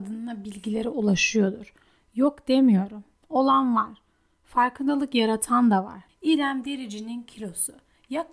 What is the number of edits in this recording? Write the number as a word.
one